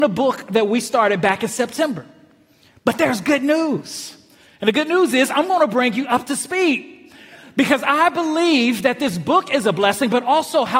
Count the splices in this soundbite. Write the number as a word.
zero